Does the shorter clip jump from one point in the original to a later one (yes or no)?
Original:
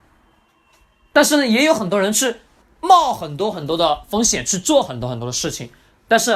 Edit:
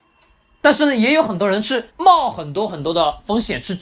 yes